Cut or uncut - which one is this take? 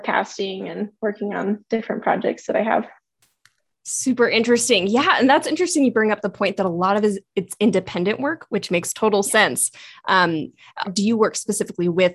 cut